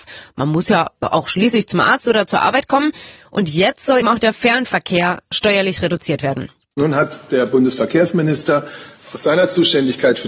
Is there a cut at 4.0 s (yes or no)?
yes